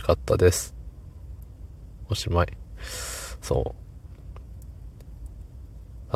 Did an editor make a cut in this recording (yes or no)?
no